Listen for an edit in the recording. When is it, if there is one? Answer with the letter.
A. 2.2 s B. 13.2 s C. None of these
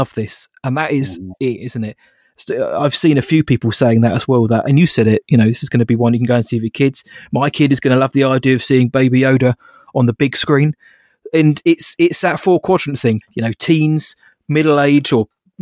B